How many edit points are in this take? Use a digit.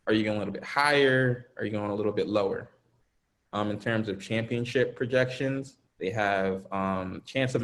2